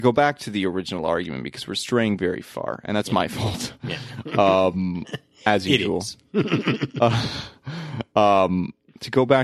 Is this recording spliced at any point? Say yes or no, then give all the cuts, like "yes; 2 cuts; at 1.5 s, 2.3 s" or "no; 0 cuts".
no; 0 cuts